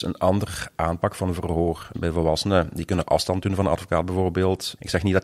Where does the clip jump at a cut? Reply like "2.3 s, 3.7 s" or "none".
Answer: 1.9 s